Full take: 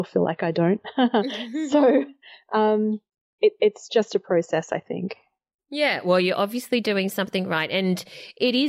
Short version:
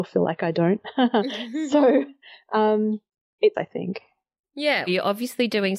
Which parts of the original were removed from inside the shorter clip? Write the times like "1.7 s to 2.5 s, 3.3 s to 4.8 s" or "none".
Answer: 3.5 s to 4.7 s, 6.0 s to 6.2 s

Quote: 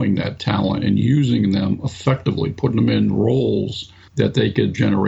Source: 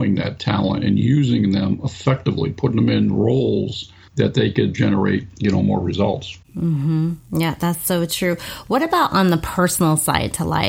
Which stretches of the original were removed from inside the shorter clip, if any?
none

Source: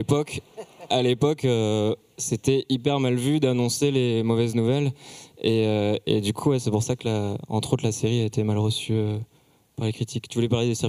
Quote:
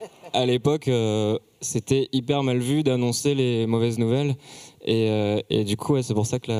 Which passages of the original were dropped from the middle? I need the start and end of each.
none

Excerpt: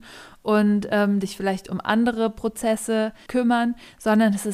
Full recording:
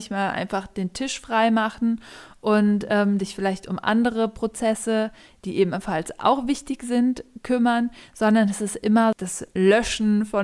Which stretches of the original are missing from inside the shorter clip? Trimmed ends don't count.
5.2 s to 7.4 s

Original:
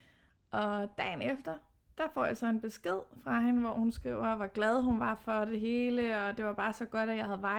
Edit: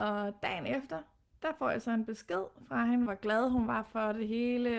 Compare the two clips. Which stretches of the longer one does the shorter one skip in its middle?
3.6 s to 4.4 s

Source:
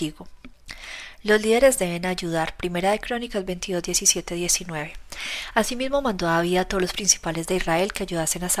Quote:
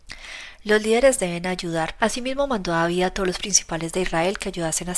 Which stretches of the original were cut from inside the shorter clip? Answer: 2.6 s to 5.5 s

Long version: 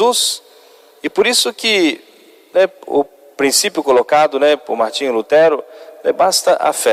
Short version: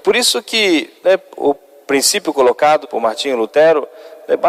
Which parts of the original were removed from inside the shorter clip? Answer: 2.1 s to 2.5 s, 4.3 s to 4.6 s

